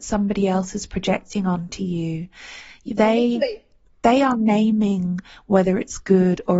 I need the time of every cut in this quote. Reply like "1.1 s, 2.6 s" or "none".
none

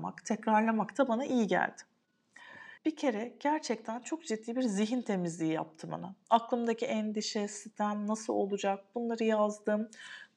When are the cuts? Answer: 2.8 s

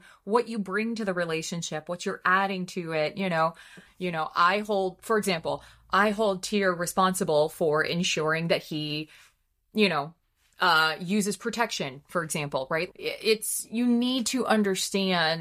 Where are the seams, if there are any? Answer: 3.9 s, 12.9 s

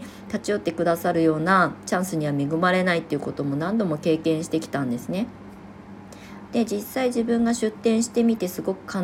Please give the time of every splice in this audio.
6.5 s

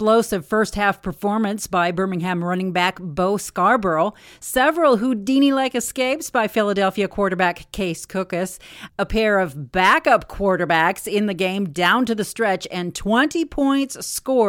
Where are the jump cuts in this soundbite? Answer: none

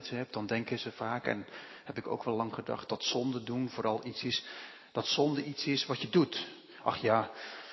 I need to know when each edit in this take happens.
none

